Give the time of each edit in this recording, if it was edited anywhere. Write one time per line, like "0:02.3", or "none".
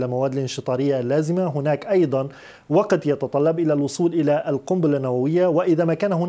none